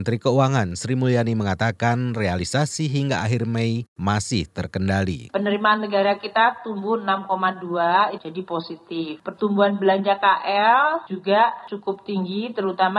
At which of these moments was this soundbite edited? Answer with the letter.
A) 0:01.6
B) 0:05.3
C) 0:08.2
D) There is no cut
C